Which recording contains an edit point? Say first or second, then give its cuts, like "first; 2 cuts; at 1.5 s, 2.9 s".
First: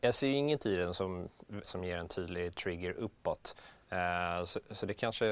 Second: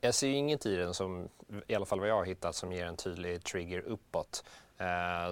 first; 1 cut; at 1.6 s